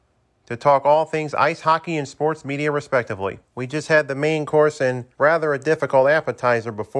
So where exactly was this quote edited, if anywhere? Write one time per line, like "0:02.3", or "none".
0:03.4
0:05.1